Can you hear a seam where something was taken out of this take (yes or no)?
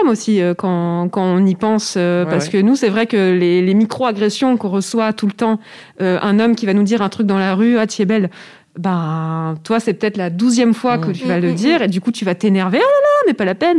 no